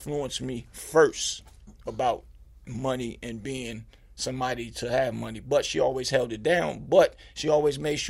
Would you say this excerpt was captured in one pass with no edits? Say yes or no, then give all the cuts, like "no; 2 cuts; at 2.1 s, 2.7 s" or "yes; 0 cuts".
yes; 0 cuts